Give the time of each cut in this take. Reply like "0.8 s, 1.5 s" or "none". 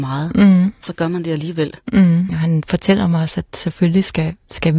2.3 s